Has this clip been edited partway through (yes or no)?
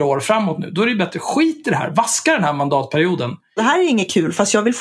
yes